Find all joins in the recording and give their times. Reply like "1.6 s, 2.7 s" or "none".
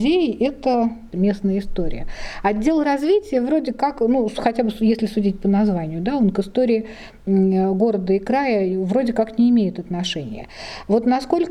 none